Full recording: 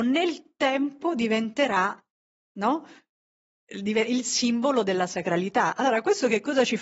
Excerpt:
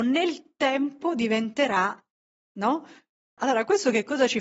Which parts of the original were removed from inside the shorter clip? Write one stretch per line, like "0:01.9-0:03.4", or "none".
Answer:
0:03.4-0:05.7

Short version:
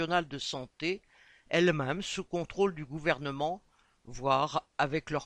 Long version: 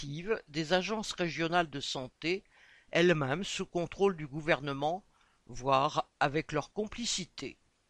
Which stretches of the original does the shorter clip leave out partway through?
none

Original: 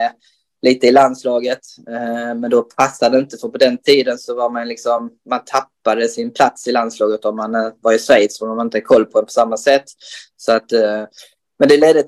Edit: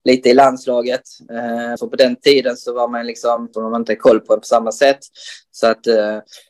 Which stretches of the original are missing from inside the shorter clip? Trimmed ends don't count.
0:02.3-0:03.4
0:05.2-0:08.4

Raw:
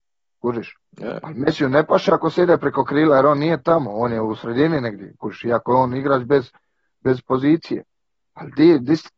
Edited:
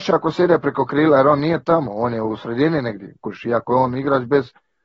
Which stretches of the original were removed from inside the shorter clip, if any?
none

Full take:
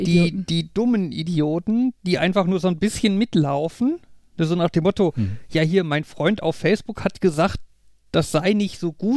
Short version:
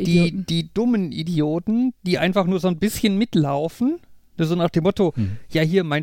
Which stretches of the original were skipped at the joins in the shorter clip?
none

